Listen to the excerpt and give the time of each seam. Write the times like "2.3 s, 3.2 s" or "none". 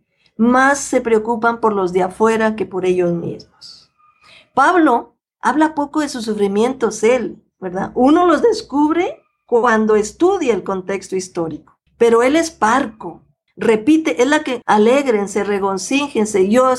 11.9 s, 13.5 s, 14.6 s